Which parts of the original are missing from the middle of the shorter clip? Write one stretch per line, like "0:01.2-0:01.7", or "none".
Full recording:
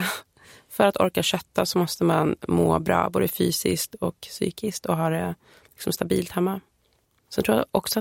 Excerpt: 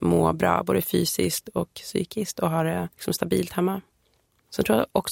0:05.4-0:05.7